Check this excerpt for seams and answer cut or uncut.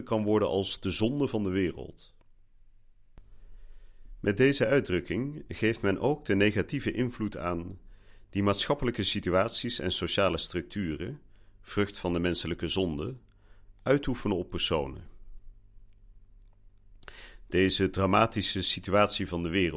uncut